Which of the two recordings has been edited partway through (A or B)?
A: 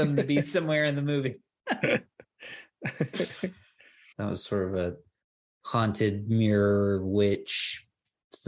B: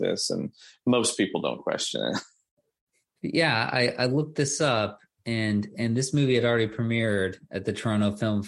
A